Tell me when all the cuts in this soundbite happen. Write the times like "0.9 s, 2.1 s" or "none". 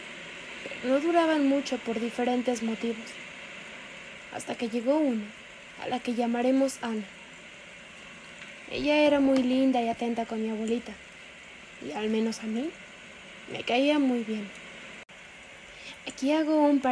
none